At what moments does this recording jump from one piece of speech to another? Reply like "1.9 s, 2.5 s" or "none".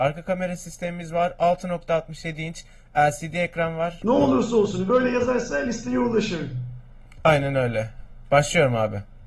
4.0 s